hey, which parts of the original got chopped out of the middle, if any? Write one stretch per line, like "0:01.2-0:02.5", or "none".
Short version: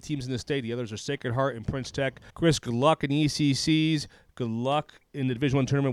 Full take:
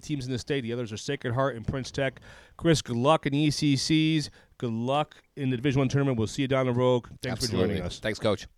0:02.3-0:02.5